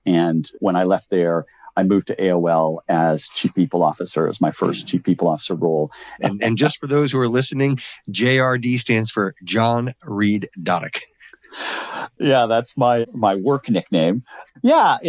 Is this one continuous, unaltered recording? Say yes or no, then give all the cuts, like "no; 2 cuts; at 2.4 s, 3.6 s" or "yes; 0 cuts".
no; 1 cut; at 6.2 s